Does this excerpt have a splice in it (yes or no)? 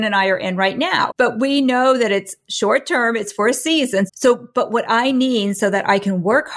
yes